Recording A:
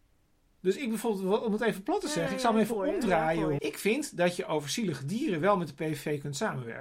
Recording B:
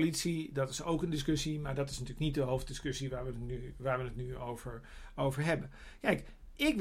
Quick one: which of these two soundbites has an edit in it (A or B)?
A